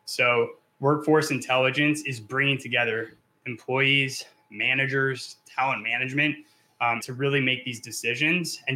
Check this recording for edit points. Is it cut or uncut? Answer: cut